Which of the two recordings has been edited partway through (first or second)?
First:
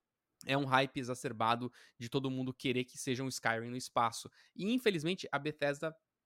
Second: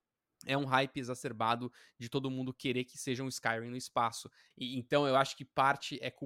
second